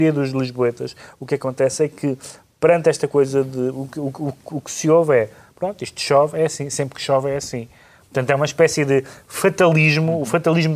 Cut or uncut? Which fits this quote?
uncut